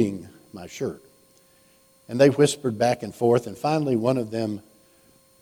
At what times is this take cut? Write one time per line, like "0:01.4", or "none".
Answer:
none